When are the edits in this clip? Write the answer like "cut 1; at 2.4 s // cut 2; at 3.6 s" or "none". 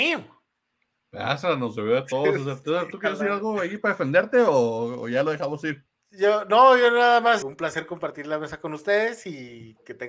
cut 1; at 7.4 s